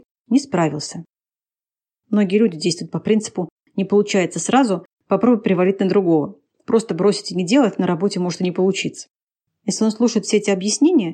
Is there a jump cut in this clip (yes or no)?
yes